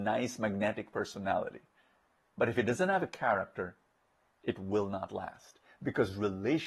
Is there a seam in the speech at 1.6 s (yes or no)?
no